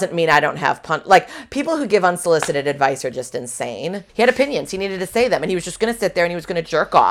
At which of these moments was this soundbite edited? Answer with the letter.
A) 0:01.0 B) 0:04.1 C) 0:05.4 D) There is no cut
B